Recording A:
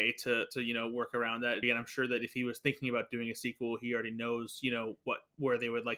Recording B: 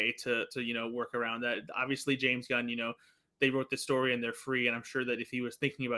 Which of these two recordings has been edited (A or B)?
A